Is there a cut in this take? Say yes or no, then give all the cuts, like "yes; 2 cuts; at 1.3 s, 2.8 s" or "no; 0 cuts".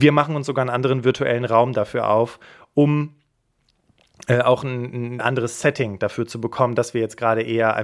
no; 0 cuts